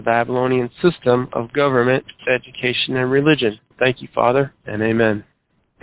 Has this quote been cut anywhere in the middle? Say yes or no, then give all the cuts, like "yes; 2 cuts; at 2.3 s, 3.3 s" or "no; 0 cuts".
yes; 2 cuts; at 2.2 s, 3.7 s